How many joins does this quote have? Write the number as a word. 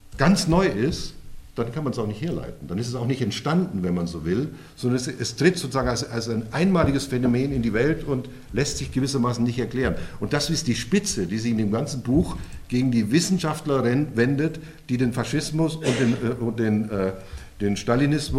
zero